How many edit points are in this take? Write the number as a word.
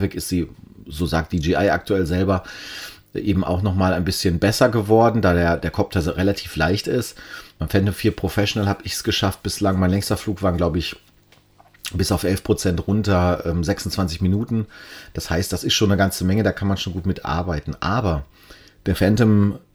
zero